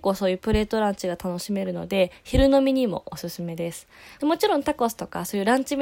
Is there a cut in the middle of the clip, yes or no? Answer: yes